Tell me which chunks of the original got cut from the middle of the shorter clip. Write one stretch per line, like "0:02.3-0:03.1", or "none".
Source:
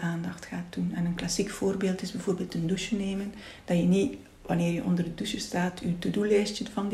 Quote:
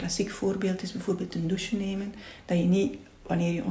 none